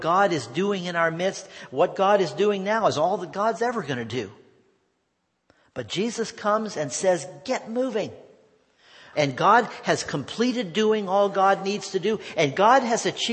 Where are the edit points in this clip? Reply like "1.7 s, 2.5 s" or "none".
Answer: 9.1 s

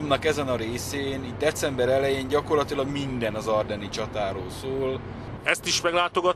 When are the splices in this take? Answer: 5.4 s

